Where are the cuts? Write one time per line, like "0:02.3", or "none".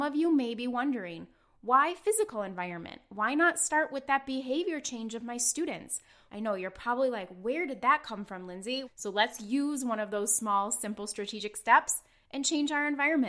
0:06.3
0:08.8